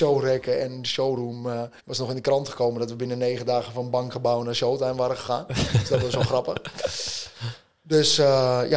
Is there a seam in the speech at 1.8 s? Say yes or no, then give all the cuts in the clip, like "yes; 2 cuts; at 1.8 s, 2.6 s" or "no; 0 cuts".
yes; 1 cut; at 1.8 s